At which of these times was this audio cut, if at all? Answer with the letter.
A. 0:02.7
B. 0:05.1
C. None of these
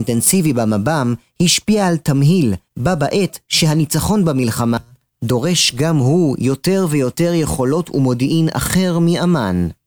A